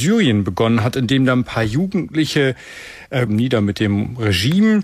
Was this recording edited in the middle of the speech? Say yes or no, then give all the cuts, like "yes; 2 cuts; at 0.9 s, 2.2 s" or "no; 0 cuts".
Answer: yes; 1 cut; at 3.3 s